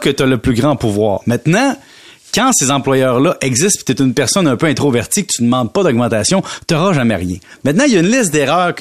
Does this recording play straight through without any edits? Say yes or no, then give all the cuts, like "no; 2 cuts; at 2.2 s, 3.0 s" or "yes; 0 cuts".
yes; 0 cuts